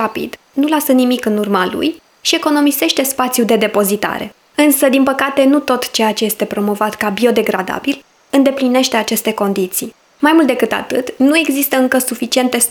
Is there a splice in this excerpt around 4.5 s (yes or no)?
no